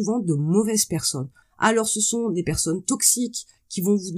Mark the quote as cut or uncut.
uncut